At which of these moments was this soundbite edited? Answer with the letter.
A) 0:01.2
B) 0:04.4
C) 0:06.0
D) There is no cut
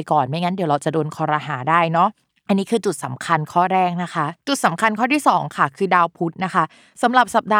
B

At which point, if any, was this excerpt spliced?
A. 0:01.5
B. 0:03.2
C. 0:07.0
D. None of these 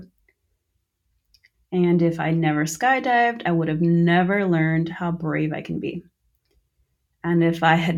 A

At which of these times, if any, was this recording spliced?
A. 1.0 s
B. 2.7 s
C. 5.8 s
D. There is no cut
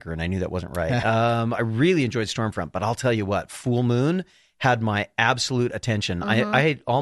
D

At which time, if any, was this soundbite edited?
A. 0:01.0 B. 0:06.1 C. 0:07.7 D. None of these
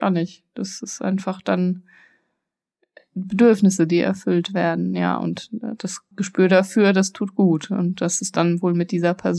B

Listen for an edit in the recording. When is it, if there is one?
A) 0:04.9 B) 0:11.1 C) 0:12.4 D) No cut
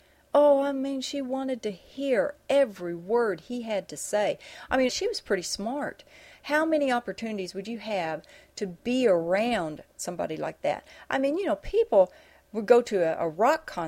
A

